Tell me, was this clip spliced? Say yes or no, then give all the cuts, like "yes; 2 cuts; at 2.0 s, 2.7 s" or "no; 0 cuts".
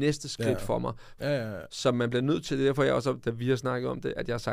yes; 1 cut; at 1.2 s